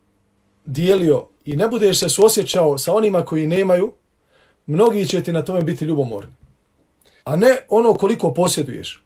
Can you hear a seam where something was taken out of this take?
yes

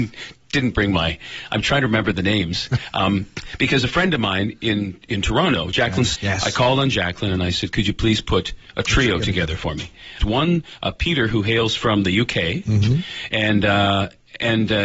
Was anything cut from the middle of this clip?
yes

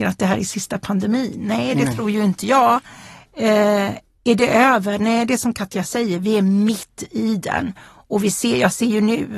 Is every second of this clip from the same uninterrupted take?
yes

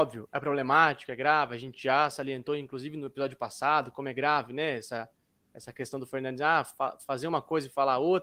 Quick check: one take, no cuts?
yes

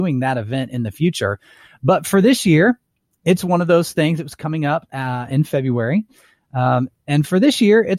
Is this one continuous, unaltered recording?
yes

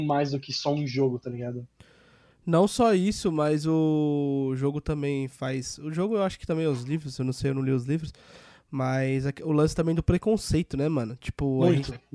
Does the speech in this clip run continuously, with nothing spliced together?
yes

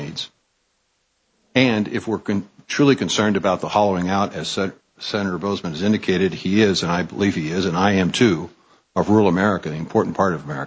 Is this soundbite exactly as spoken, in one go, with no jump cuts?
yes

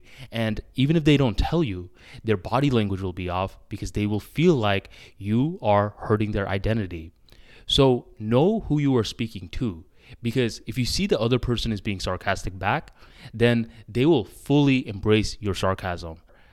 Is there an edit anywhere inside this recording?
no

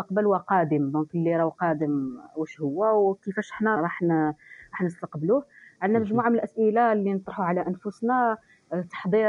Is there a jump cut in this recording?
yes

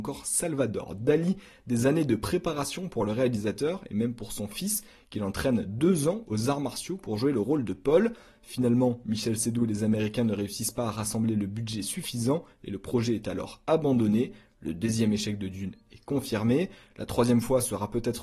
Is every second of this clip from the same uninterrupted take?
yes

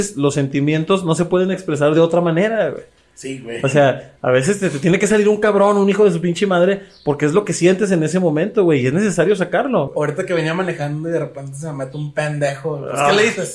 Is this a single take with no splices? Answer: no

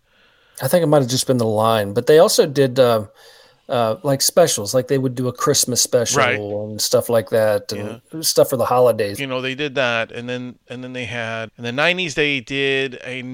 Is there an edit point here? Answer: yes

